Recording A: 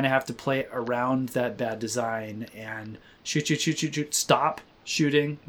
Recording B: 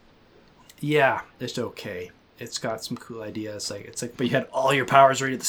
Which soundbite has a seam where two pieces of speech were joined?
B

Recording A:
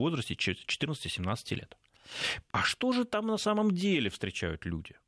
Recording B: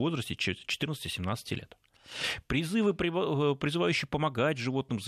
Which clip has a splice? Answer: A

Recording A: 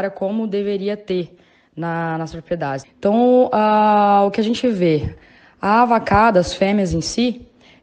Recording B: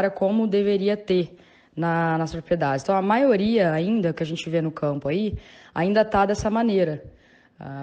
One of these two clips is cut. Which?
A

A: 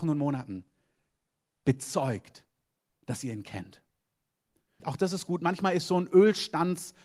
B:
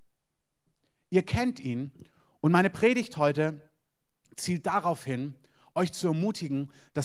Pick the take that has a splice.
A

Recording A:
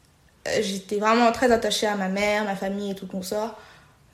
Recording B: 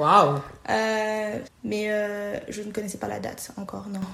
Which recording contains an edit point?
B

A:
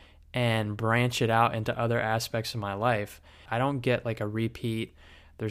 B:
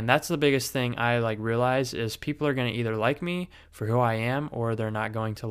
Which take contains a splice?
A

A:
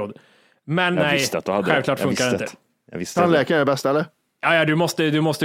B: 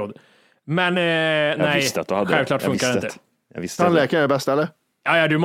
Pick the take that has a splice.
A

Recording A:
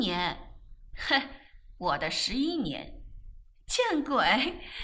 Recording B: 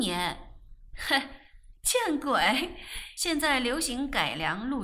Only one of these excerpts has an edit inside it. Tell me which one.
B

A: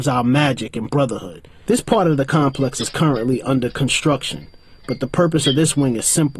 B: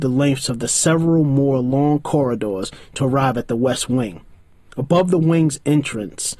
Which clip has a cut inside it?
A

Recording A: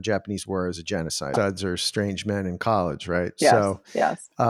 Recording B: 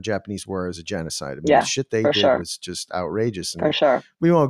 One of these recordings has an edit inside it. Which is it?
A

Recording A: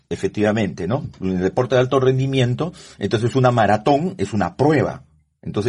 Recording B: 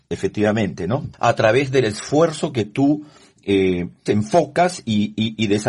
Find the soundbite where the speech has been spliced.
B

